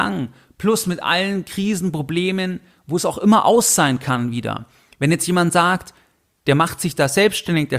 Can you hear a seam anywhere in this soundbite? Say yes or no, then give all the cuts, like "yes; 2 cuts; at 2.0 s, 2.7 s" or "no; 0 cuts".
no; 0 cuts